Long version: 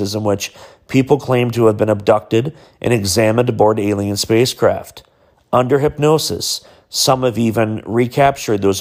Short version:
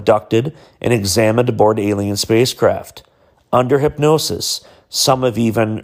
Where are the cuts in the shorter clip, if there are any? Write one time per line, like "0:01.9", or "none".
none